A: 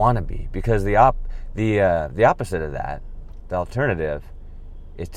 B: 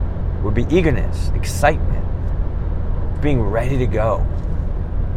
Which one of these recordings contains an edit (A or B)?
B